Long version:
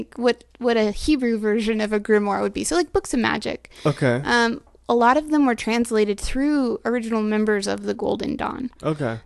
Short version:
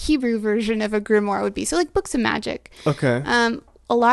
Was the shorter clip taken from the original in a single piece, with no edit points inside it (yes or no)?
yes